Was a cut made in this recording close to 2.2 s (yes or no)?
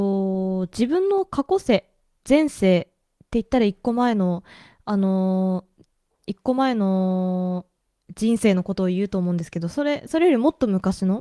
yes